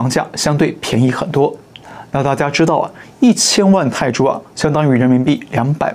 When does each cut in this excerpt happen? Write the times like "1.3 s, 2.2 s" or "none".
none

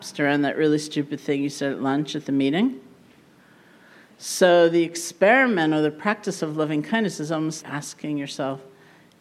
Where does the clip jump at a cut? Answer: 7.6 s

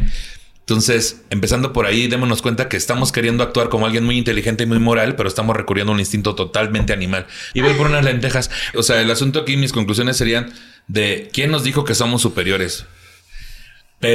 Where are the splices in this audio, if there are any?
7.5 s, 8.7 s

